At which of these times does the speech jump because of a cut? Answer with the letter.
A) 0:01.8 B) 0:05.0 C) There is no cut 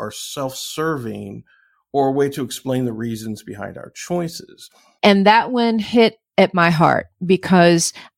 B